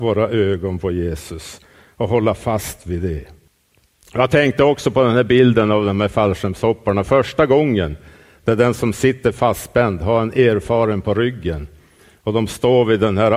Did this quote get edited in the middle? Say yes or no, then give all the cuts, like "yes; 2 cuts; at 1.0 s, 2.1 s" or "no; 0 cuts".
no; 0 cuts